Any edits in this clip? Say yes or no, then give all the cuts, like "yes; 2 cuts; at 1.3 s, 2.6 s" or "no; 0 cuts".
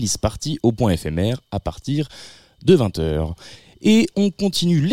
no; 0 cuts